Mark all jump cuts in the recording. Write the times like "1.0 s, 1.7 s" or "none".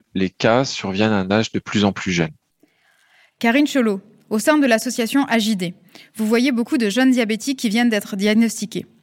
none